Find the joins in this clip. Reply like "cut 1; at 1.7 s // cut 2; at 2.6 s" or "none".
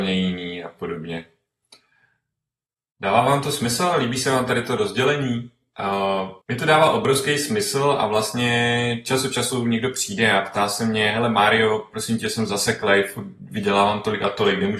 cut 1; at 6.4 s

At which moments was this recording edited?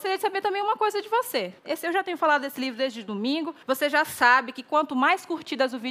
cut 1; at 1.6 s // cut 2; at 3.6 s

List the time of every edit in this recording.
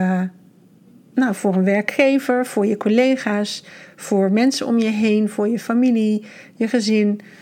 none

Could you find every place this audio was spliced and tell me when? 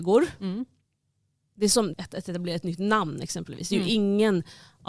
cut 1; at 1.9 s

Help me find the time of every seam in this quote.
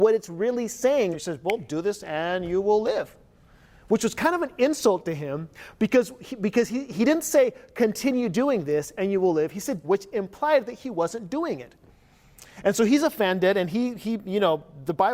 cut 1; at 1.1 s // cut 2; at 9.8 s

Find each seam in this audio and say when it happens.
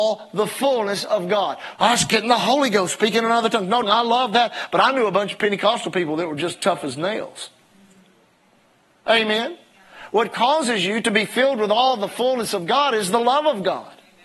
cut 1; at 1.7 s // cut 2; at 3.8 s

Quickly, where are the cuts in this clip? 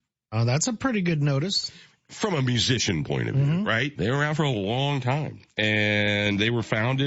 cut 1; at 4.0 s

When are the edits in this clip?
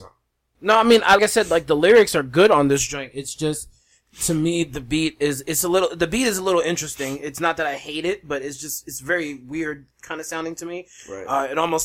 cut 1; at 1.2 s

